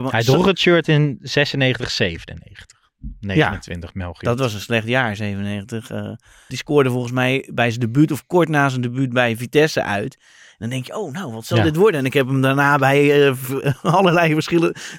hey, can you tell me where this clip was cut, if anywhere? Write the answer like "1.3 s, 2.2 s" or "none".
6.5 s